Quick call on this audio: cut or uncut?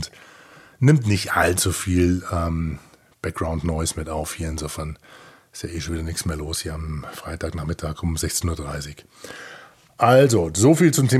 uncut